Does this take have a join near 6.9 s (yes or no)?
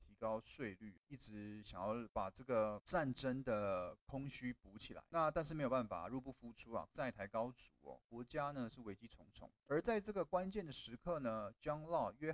yes